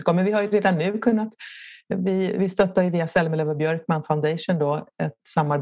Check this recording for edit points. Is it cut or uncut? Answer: uncut